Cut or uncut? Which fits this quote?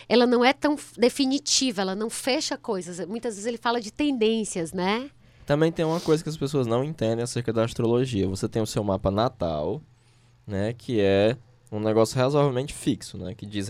uncut